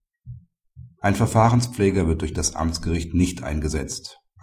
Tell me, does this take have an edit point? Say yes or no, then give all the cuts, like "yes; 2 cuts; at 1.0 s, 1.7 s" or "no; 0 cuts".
no; 0 cuts